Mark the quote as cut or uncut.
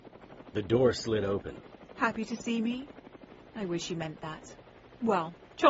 cut